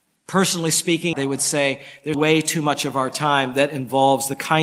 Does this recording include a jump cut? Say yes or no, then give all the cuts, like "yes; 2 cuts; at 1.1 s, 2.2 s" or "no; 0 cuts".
yes; 2 cuts; at 1.1 s, 2.1 s